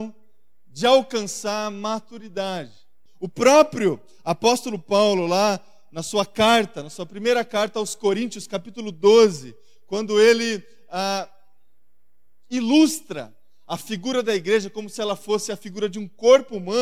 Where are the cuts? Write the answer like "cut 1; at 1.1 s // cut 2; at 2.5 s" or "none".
cut 1; at 3.1 s